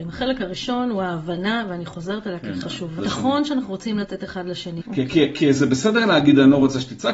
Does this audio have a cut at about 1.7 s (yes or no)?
no